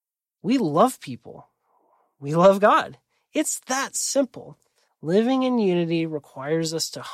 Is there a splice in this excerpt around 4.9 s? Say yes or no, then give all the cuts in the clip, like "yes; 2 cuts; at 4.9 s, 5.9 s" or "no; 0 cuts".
yes; 1 cut; at 4.9 s